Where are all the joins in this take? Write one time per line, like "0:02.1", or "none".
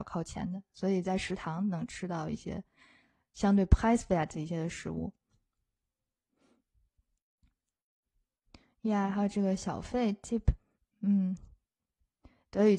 none